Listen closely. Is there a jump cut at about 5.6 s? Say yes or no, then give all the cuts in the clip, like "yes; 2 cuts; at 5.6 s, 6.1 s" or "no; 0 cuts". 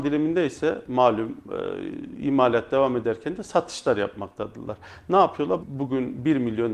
yes; 1 cut; at 5.6 s